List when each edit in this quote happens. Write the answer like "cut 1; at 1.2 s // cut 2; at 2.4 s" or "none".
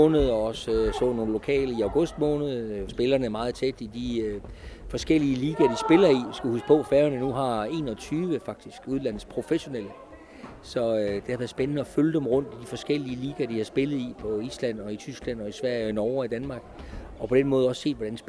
cut 1; at 2.9 s